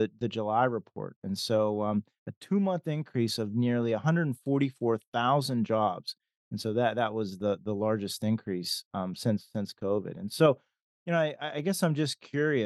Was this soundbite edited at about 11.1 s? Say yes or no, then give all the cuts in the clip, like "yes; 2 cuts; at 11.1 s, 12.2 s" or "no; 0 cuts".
no; 0 cuts